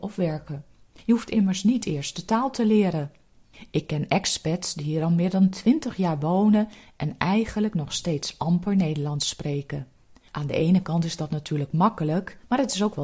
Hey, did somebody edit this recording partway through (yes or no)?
no